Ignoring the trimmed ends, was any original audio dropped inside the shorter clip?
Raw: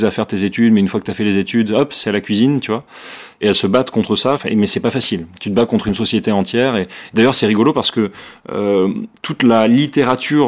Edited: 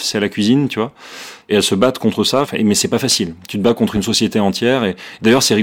no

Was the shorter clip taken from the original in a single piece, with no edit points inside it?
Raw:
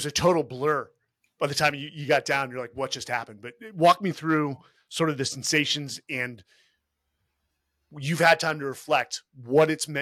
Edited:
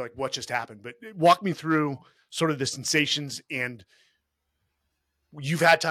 yes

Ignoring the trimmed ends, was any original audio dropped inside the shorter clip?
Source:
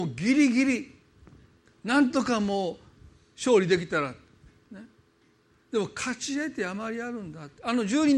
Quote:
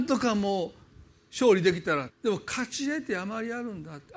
yes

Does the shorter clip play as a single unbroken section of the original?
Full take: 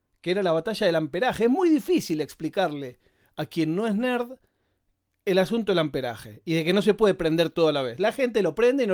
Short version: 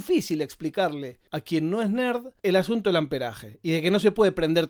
no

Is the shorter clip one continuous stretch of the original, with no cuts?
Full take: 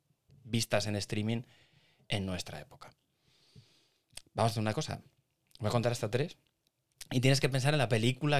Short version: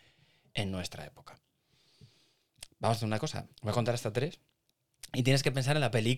no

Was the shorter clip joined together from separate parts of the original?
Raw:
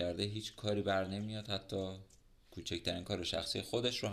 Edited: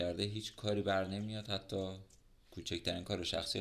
no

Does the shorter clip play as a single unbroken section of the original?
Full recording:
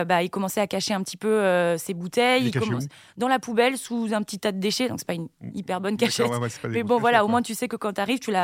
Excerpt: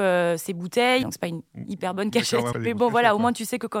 no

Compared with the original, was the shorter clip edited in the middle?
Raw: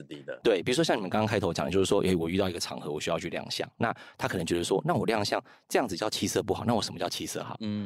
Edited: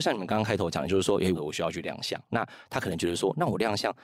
yes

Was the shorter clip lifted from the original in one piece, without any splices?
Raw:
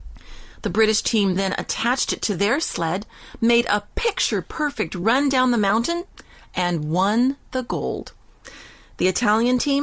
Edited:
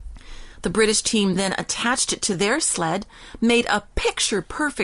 yes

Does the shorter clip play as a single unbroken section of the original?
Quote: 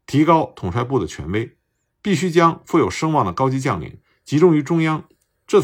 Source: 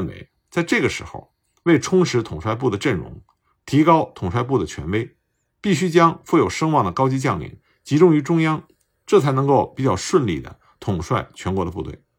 yes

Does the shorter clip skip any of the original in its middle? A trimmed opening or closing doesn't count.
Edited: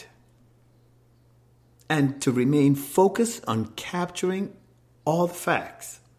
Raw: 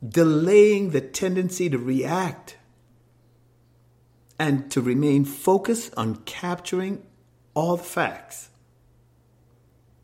no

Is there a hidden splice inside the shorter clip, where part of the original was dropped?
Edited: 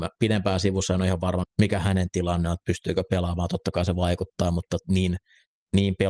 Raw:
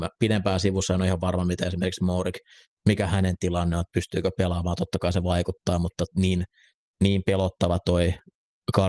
yes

